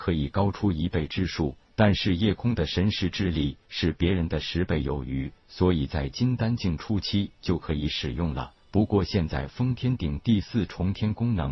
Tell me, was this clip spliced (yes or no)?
yes